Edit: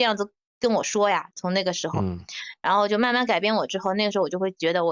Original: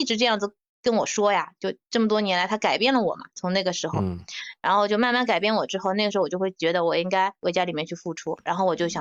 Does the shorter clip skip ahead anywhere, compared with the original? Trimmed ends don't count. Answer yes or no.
yes